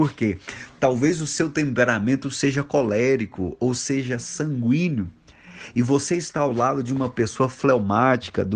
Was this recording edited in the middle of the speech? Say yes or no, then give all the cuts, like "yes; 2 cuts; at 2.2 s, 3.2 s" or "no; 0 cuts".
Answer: no; 0 cuts